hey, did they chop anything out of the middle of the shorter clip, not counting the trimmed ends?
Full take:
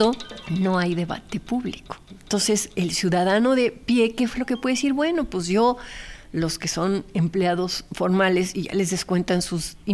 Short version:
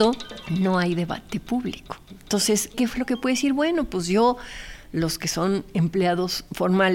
yes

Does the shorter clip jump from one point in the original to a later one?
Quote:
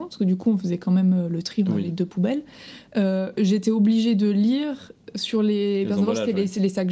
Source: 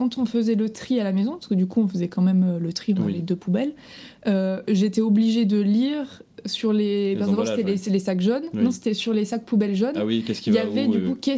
no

